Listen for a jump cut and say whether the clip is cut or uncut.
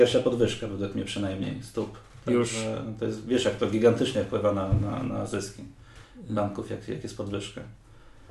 uncut